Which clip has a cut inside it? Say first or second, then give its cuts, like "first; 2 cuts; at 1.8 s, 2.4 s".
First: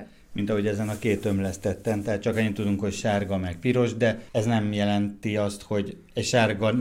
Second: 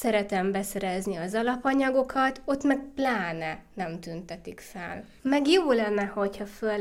second; 1 cut; at 5.2 s